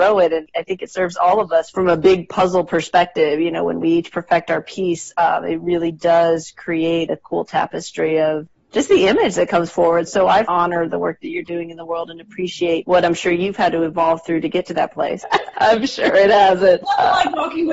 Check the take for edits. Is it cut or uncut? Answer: cut